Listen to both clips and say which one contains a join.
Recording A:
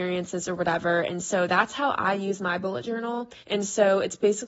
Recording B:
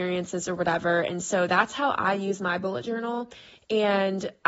A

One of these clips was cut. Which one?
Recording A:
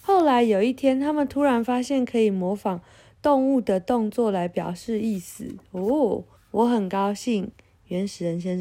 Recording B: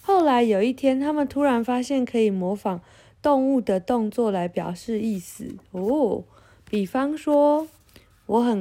A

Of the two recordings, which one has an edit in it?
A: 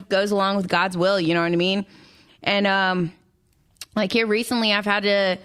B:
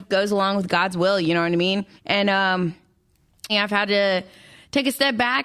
B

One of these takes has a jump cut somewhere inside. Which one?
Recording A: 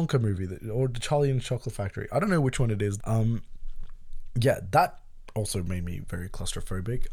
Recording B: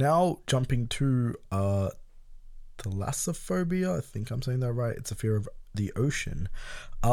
A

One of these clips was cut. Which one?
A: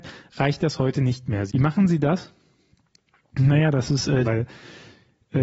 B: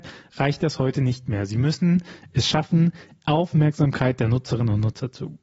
A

